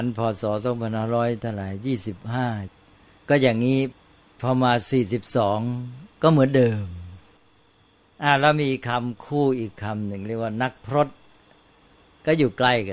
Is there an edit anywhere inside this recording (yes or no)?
no